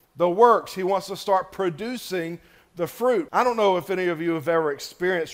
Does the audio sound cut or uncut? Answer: cut